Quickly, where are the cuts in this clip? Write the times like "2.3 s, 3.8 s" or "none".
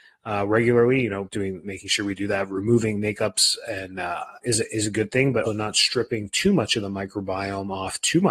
1.3 s, 4.4 s, 5.4 s